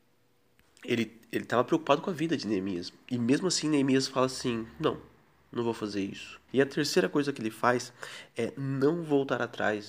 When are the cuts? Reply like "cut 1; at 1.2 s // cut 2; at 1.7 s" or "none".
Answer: cut 1; at 6.5 s